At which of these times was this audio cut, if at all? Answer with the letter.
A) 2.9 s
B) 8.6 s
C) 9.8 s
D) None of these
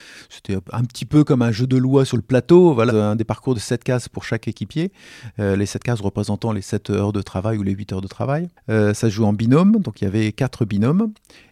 A